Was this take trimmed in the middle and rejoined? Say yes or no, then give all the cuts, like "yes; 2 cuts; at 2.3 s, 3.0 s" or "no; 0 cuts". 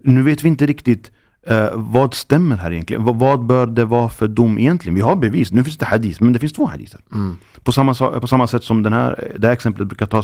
no; 0 cuts